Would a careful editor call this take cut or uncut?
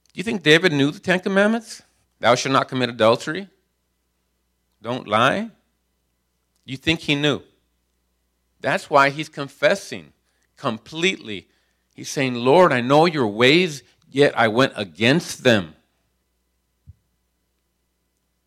cut